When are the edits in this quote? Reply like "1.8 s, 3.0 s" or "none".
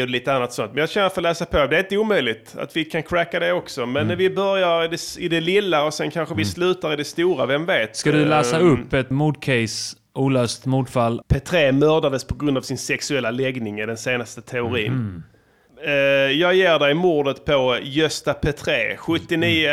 9.1 s, 11.2 s, 15.7 s